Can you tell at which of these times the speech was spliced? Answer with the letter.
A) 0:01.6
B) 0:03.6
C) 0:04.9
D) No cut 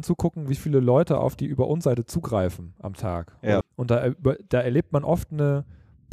B